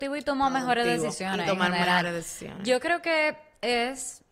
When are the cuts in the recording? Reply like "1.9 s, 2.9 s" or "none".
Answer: none